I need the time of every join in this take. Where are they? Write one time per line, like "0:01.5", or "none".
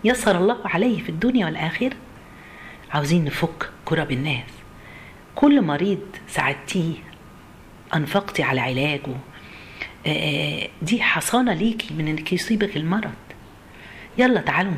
0:07.8